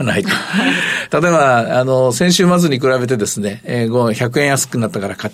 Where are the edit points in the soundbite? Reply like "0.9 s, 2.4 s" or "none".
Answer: none